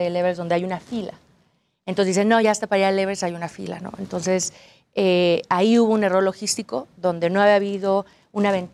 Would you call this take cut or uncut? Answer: uncut